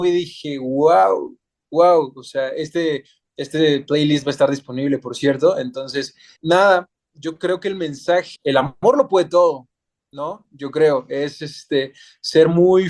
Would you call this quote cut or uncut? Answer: cut